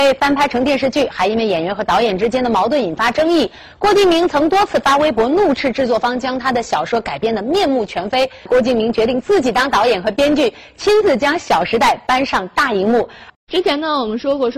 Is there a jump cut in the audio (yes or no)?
yes